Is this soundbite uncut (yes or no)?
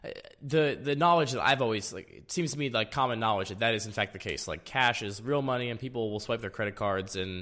yes